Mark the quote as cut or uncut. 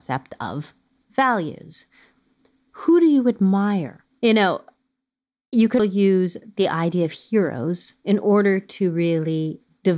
cut